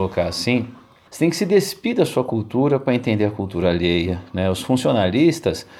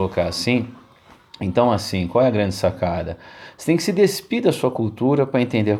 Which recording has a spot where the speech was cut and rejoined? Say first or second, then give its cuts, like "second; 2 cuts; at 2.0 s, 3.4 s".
first; 1 cut; at 1.1 s